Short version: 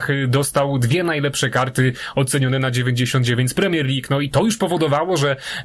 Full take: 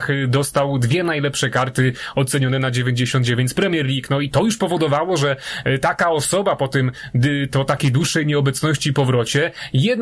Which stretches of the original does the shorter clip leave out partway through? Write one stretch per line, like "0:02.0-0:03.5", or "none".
none